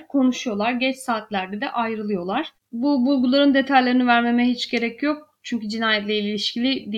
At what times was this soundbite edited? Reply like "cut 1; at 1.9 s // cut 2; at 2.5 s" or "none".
cut 1; at 2.6 s